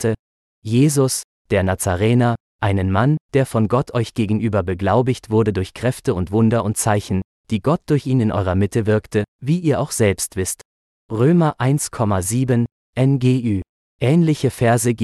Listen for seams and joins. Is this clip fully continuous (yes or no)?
no